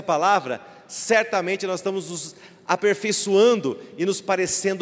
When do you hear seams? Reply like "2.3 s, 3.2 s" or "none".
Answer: none